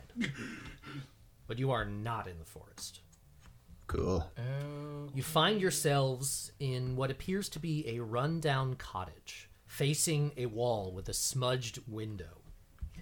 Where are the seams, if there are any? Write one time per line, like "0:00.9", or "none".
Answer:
0:09.6